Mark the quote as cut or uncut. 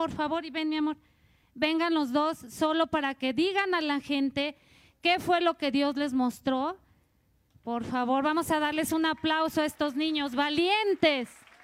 uncut